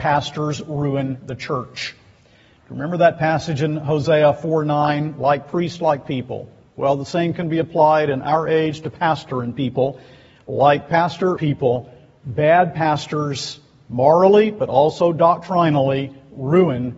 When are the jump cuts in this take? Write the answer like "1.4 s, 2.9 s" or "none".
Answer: 11.4 s